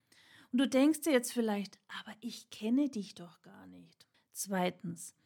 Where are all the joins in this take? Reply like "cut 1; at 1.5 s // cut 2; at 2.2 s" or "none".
cut 1; at 4.1 s